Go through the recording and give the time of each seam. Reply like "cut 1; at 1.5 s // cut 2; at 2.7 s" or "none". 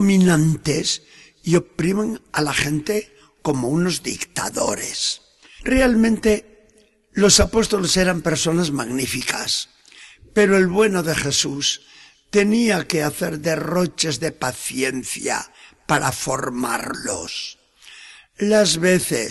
cut 1; at 5.6 s